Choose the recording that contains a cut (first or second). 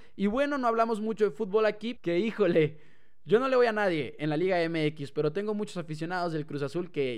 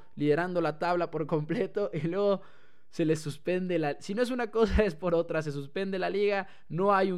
first